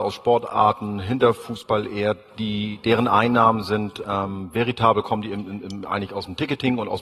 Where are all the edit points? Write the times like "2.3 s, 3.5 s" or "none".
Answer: none